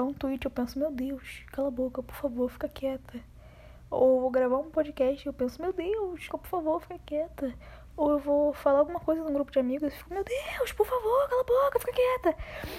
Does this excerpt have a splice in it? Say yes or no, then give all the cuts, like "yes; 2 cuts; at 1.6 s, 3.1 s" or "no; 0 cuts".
yes; 1 cut; at 6.3 s